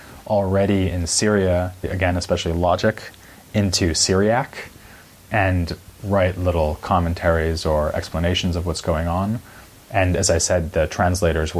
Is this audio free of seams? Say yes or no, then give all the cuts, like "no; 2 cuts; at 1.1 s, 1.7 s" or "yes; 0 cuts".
no; 2 cuts; at 1.8 s, 9.8 s